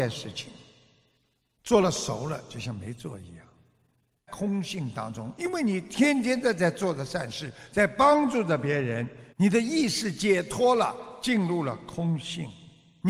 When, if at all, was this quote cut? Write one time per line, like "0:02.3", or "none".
0:04.3
0:09.3

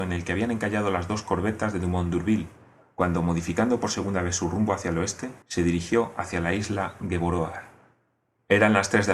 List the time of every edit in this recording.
0:05.4

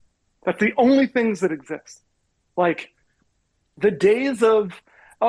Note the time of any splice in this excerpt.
none

